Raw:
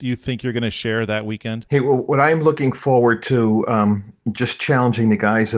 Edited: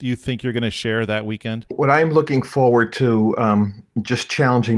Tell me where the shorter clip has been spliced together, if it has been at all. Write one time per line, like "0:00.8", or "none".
0:01.7